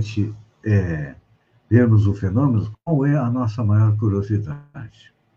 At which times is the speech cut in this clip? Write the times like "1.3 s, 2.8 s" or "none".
2.7 s